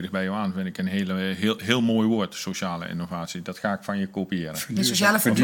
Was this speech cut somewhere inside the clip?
no; 0 cuts

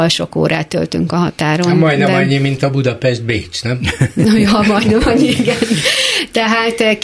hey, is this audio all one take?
yes; 0 cuts

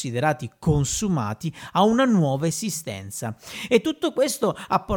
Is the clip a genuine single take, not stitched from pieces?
yes; 0 cuts

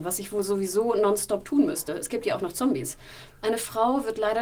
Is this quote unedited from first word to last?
yes; 0 cuts

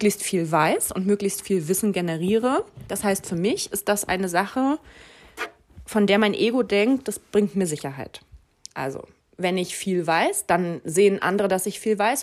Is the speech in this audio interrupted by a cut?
no; 0 cuts

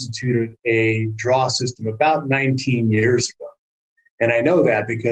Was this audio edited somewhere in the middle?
no; 0 cuts

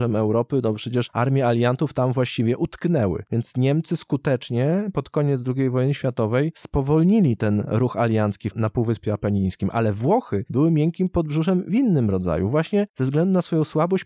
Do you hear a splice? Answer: yes; 1 cut; at 3.2 s

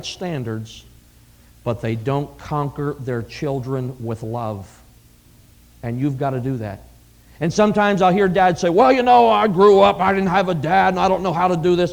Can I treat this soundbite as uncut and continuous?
yes; 0 cuts

